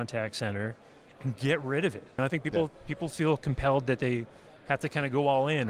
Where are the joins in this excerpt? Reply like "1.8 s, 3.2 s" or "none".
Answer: 2.2 s